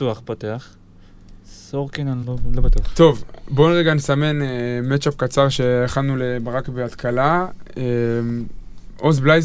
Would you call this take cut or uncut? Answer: cut